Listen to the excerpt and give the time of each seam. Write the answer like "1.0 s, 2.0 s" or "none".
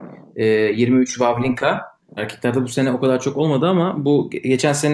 2.2 s